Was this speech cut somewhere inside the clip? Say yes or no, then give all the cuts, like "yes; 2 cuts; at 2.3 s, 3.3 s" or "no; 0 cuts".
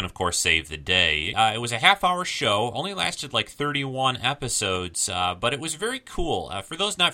yes; 1 cut; at 1.3 s